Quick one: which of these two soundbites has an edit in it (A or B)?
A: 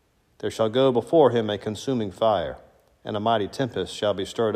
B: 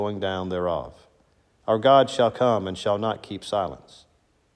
B